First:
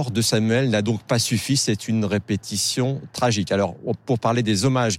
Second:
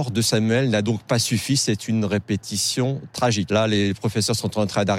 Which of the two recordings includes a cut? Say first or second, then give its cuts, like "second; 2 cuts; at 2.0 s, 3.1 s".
second; 1 cut; at 3.5 s